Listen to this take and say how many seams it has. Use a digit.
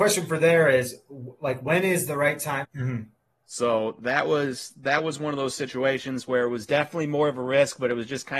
1